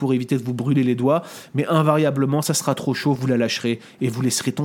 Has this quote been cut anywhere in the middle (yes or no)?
no